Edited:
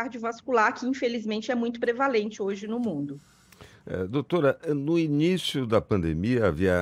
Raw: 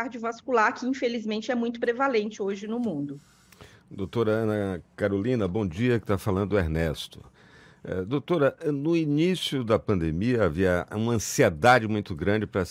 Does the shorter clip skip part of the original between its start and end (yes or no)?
yes